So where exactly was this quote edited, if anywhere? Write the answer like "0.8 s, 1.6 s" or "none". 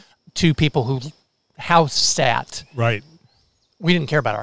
none